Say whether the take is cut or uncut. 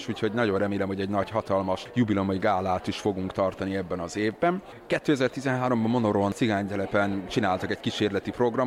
uncut